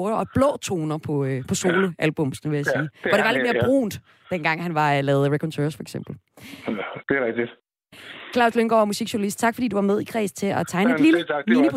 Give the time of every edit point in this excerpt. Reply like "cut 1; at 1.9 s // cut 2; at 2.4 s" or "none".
none

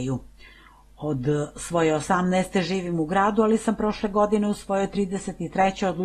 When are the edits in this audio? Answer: none

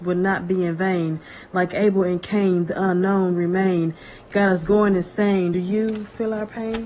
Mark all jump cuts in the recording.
none

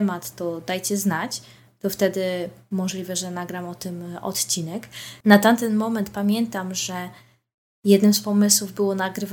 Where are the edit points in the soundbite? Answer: cut 1; at 5.2 s

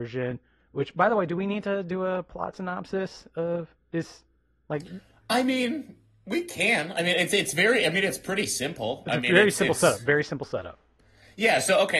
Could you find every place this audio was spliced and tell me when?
none

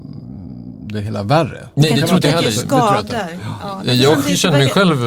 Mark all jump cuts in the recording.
cut 1; at 1.7 s

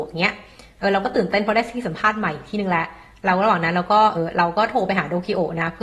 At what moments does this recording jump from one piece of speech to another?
cut 1; at 4.1 s

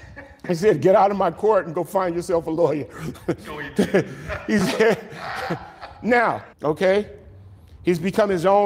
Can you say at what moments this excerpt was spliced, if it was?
cut 1; at 6.5 s

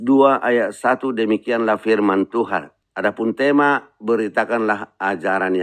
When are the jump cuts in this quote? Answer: cut 1; at 2.8 s

